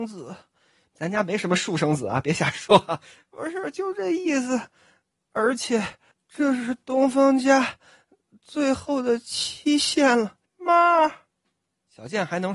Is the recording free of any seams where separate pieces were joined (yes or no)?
no